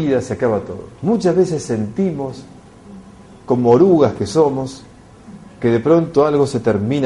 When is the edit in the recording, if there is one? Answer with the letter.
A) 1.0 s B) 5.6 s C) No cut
A